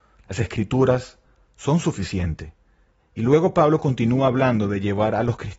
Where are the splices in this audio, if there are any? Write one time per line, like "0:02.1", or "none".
none